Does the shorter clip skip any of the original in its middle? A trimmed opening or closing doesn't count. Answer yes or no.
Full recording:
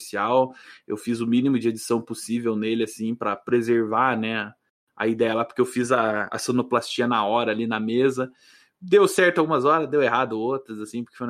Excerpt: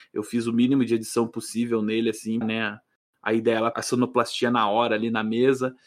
yes